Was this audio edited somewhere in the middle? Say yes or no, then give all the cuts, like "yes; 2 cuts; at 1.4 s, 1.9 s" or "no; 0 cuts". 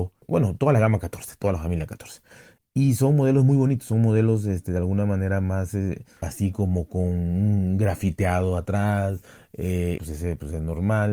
yes; 3 cuts; at 2.6 s, 6.2 s, 10.0 s